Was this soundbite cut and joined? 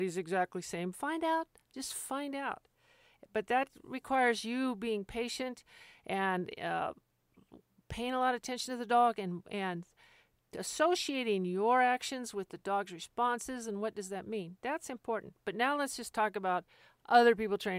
yes; 1 cut; at 10.4 s

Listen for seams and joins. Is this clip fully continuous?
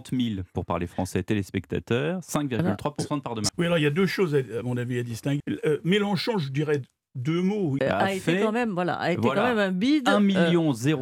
no; 3 cuts; at 3.5 s, 5.4 s, 7.8 s

